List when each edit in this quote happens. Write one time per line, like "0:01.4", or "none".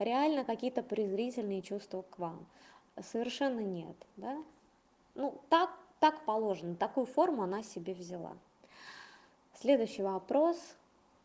none